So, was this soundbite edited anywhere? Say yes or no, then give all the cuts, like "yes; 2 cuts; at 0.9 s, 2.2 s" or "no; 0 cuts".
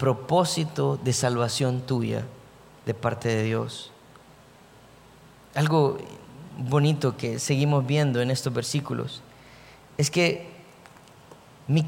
no; 0 cuts